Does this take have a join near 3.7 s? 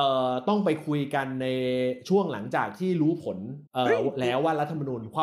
yes; 1 cut; at 3.7 s

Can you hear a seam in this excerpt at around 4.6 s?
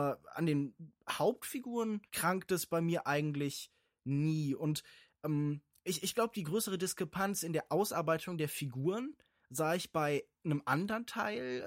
no; 1 cut; at 2.1 s

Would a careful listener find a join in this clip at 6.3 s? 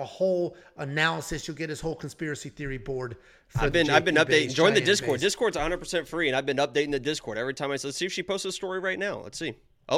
no; 0 cuts

